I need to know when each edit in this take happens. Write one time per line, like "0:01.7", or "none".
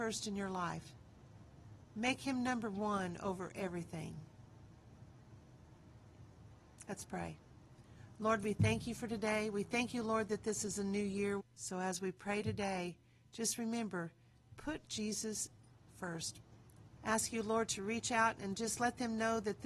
0:11.4
0:17.0